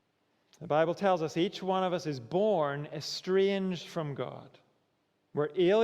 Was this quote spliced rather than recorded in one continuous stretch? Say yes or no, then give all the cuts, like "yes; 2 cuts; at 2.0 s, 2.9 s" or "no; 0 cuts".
no; 0 cuts